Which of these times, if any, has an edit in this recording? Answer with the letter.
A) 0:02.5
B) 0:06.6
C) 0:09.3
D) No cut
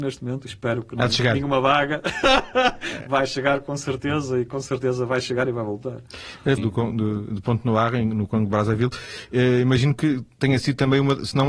B